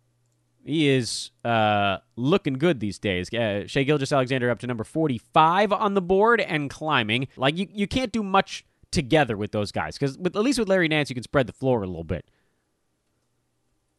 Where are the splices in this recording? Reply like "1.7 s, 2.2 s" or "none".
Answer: 7.4 s